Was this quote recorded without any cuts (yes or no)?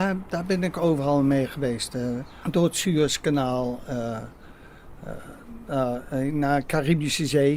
no